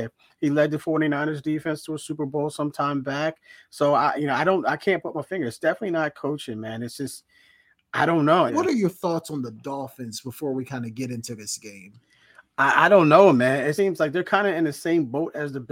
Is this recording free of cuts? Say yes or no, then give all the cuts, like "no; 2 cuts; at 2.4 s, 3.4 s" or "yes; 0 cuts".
no; 2 cuts; at 8.5 s, 13.8 s